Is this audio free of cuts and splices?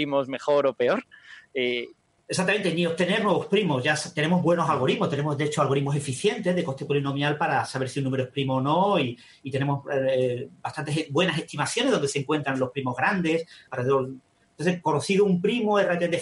yes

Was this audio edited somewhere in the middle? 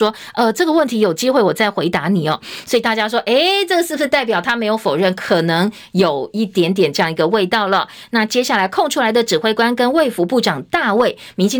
no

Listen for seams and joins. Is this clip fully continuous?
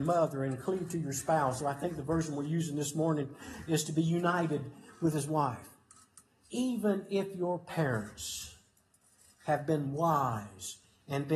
no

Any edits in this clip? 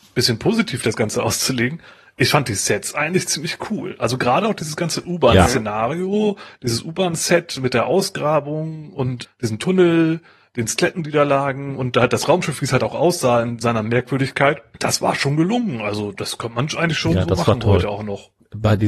no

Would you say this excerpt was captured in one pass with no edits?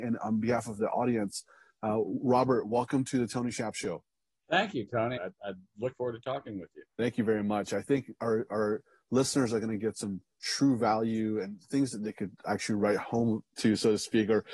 no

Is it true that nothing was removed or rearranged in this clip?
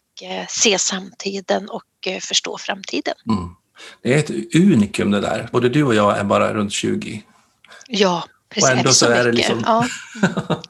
no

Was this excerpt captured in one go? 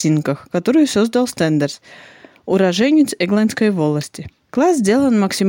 yes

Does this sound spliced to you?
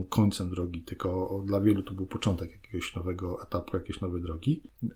no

